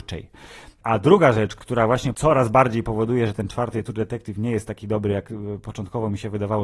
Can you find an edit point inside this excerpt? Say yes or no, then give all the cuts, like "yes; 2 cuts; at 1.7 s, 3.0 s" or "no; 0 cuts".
no; 0 cuts